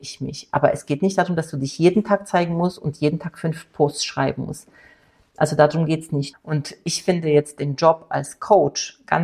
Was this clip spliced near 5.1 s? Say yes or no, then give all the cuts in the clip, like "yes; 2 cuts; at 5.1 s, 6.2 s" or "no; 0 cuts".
no; 1 cut; at 6.3 s